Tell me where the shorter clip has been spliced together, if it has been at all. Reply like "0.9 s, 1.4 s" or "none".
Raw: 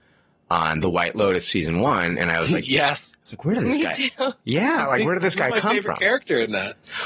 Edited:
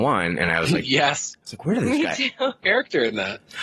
2.6 s

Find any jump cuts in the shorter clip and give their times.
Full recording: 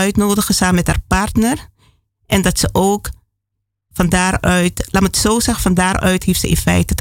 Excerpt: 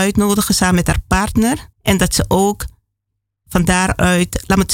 1.7 s

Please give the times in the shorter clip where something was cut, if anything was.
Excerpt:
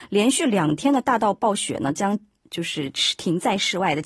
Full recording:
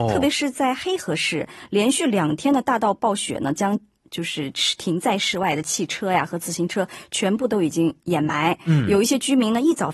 none

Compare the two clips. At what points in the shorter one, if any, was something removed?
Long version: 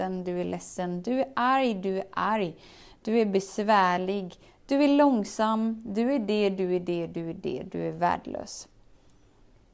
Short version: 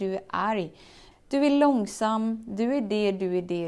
1.1 s

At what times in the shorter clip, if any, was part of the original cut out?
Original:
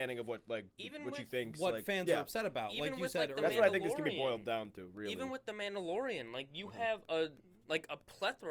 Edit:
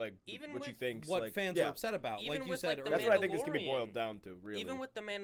none

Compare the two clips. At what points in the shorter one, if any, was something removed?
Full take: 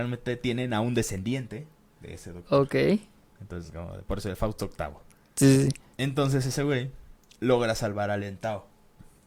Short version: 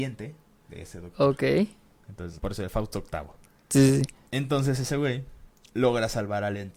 2.4 s

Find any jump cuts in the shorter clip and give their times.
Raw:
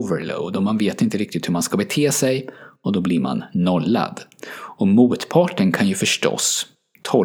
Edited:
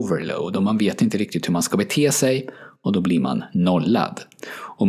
none

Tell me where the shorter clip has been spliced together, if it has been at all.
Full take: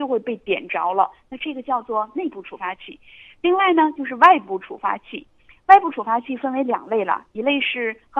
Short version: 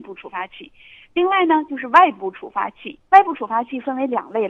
3.1 s

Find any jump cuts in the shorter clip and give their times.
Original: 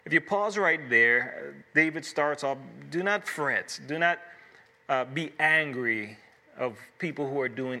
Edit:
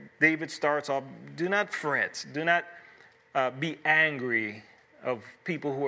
none

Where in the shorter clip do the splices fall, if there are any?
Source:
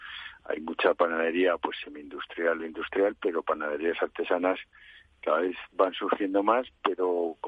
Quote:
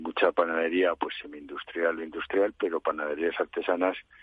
none

